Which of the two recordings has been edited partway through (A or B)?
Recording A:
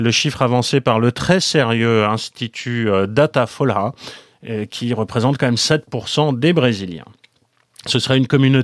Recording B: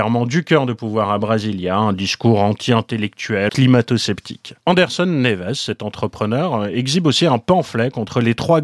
B